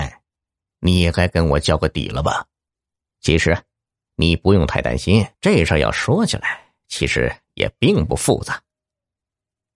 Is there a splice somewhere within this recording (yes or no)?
yes